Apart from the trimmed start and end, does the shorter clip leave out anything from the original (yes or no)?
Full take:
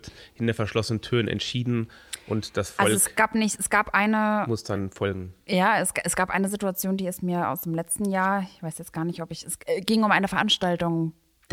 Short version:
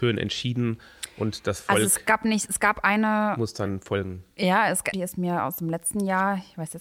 yes